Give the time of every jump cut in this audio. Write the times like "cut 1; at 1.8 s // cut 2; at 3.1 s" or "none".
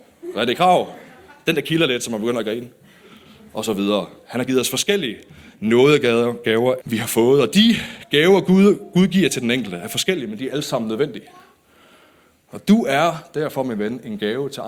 cut 1; at 6.8 s